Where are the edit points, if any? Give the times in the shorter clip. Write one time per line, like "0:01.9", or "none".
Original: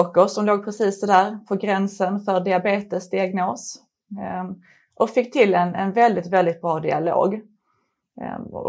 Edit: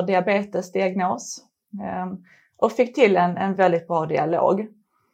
0:03.5